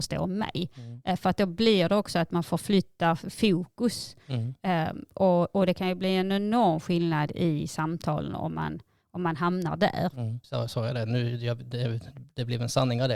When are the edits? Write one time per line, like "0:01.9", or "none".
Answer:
0:10.4